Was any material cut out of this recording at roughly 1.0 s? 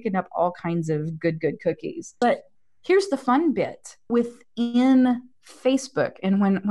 no; 2 cuts; at 2.2 s, 4.1 s

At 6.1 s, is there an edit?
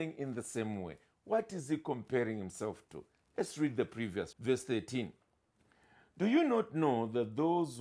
no; 1 cut; at 4.3 s

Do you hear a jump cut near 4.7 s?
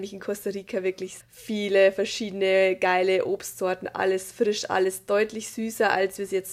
no; 1 cut; at 1.2 s

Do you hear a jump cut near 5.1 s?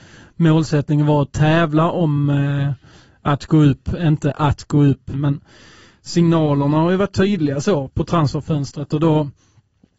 yes; 2 cuts; at 5.1 s, 7.9 s

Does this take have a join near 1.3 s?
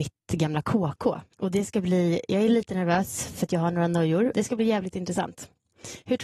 yes; 2 cuts; at 1.3 s, 4.3 s

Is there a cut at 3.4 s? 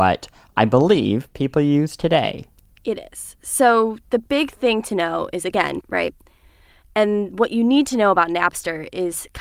no; 1 cut; at 5.8 s

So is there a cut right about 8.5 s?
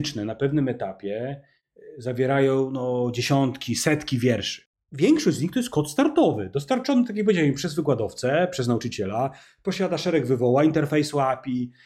no; 0 cuts

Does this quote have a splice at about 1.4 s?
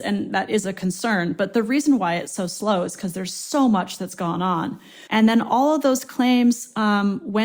no; 1 cut; at 5.1 s

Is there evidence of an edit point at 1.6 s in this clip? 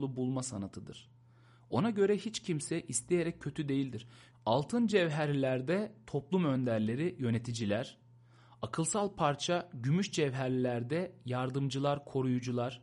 no; 1 cut; at 4.3 s

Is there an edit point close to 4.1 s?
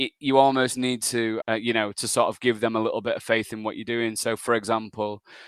no; 1 cut; at 1.4 s

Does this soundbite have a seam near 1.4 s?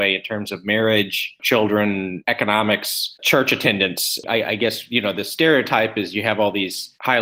no; 1 cut; at 3.2 s

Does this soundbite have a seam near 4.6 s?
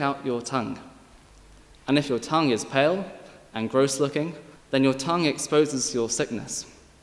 yes; 1 cut; at 4.6 s

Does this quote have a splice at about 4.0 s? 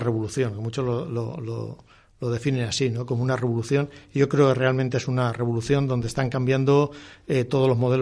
no; 0 cuts

